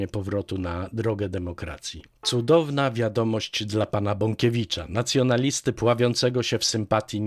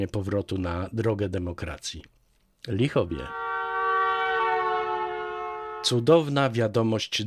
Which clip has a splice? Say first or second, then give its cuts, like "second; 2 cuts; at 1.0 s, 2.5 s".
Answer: first; 1 cut; at 2.2 s